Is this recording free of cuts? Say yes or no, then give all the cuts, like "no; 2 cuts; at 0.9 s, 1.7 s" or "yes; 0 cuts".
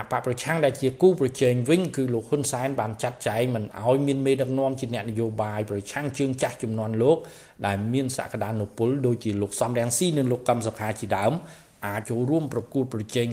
no; 1 cut; at 12.0 s